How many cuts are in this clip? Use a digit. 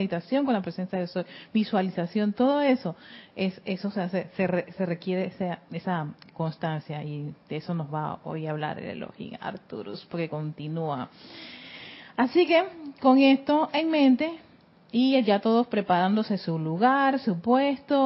0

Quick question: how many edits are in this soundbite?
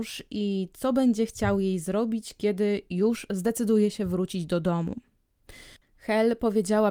1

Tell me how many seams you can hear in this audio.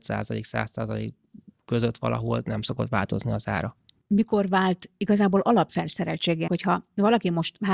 2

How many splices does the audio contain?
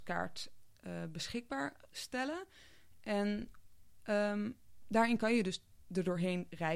0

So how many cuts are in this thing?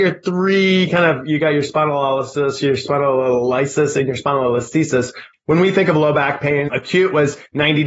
2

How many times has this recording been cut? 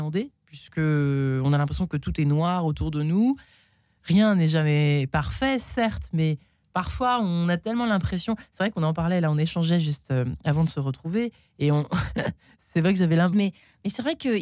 1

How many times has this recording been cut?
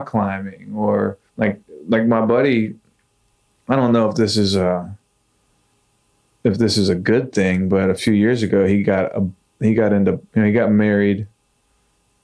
2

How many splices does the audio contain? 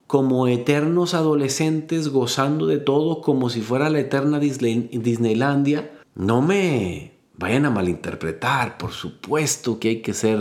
1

